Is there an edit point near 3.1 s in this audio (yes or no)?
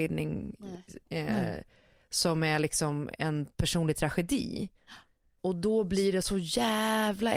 yes